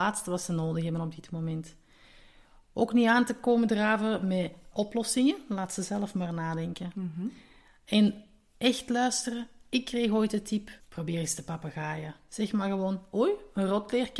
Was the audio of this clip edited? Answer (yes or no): yes